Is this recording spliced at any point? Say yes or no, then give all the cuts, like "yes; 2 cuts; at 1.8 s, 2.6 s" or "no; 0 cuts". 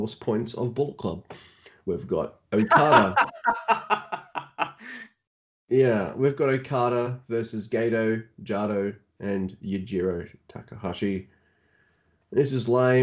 no; 0 cuts